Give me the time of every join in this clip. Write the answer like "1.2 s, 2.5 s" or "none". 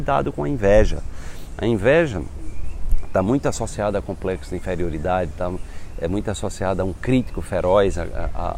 none